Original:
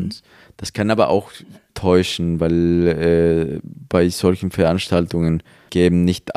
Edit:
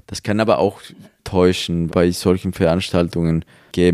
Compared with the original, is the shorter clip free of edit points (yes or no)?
no